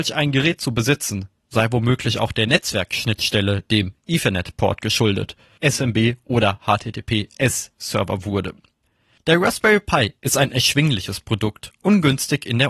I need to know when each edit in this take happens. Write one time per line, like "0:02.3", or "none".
0:05.6

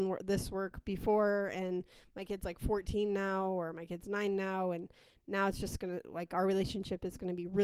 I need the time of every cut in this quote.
none

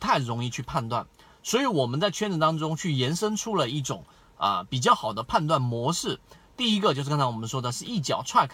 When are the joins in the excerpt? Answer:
none

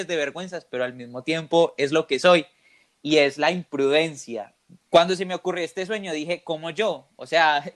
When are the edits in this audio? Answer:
0:04.8

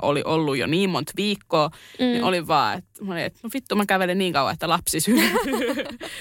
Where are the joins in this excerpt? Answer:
none

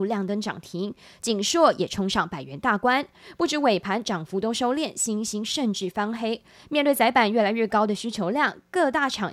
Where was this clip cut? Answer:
none

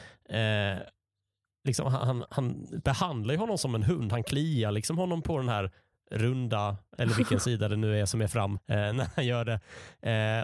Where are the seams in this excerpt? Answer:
0:06.9
0:08.6

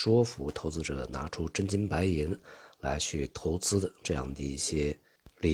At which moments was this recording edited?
none

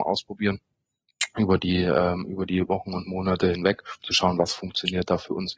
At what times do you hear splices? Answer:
none

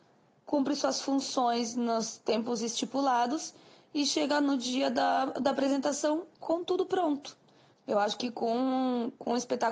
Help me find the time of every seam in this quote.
0:07.7

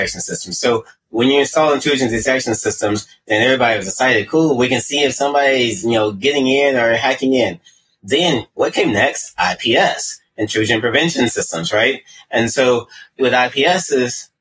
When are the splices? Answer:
none

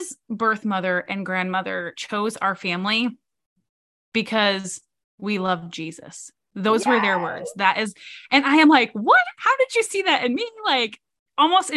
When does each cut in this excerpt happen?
none

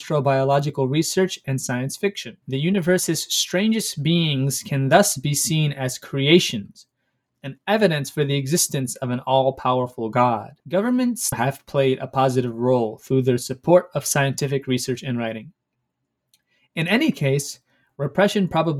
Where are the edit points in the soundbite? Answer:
0:11.3

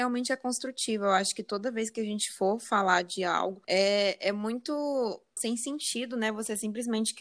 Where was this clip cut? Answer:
0:03.6
0:05.4

